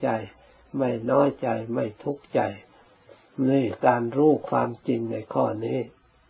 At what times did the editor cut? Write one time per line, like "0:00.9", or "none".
none